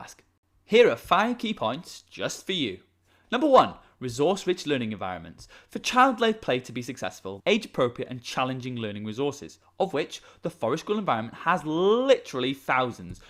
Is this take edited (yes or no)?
yes